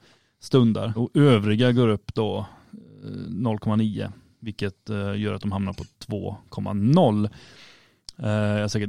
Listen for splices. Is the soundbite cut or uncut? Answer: cut